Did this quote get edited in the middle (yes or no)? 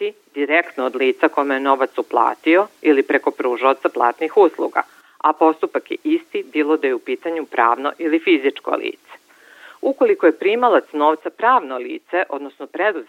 no